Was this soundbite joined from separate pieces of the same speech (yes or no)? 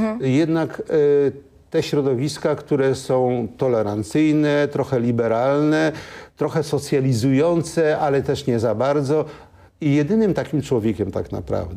no